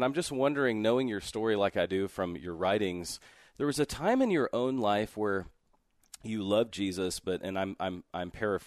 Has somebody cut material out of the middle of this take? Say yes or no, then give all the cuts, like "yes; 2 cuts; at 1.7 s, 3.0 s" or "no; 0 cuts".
no; 0 cuts